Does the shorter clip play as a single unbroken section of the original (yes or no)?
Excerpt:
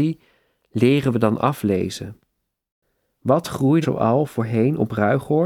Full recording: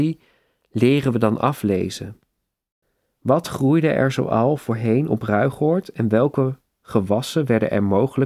no